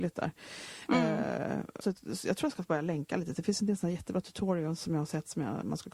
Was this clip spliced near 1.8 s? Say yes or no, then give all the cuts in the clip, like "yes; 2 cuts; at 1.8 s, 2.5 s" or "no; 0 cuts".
yes; 1 cut; at 1.8 s